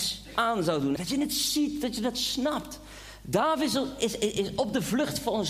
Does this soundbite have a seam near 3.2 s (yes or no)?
no